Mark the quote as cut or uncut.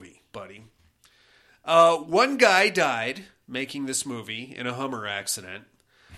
uncut